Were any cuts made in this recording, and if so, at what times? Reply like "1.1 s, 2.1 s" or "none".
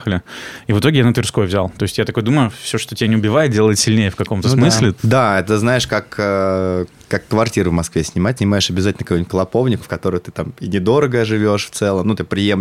5.0 s, 8.4 s, 9.8 s